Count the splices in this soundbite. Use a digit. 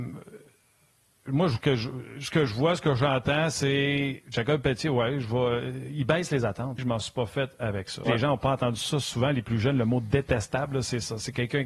2